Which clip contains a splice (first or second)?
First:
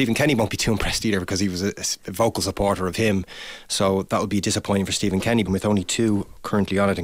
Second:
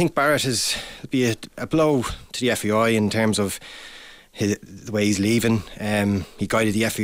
first